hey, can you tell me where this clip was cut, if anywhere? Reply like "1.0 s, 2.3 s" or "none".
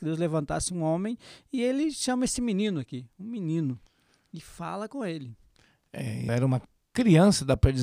6.3 s